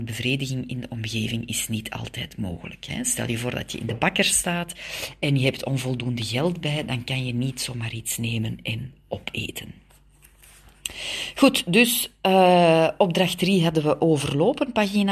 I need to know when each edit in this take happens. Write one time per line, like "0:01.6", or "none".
none